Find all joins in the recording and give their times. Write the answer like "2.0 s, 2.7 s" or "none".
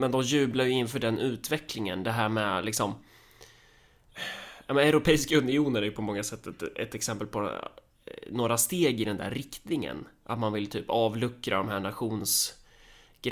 none

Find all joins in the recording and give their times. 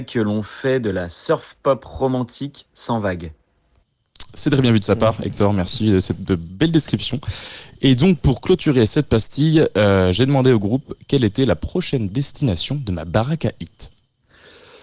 none

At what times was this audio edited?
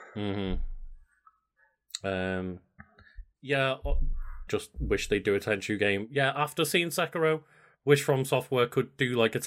4.5 s

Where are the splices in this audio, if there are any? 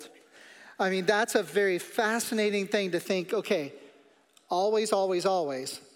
4.4 s

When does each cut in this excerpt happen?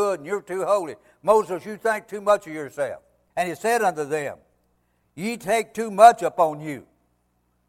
3.3 s

